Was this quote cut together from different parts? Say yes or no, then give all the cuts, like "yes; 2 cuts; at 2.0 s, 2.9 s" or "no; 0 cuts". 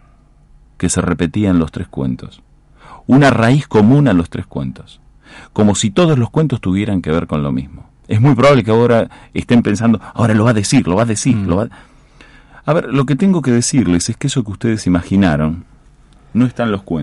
no; 0 cuts